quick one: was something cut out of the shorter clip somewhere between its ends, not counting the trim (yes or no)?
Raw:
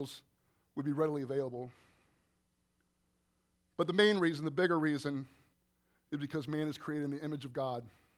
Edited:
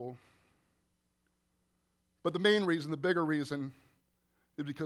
no